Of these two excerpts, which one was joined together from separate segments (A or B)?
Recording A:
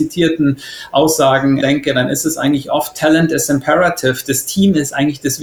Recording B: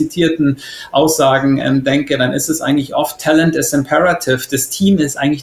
A